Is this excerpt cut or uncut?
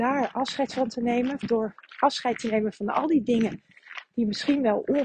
cut